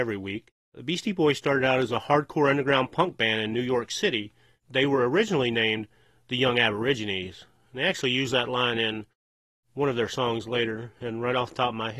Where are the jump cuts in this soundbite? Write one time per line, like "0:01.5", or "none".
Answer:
none